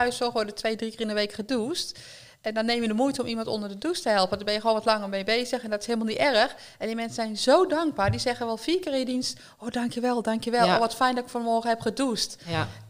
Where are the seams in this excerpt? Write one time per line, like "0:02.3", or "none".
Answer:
none